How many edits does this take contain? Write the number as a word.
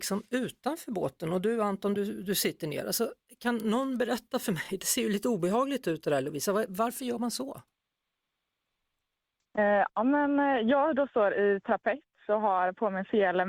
zero